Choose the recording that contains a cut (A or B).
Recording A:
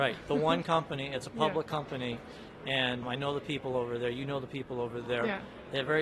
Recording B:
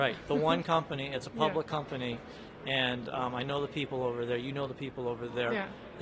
A